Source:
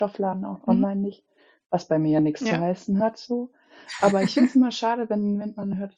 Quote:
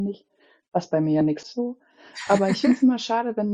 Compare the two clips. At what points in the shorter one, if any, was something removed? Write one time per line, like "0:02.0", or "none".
0:01.4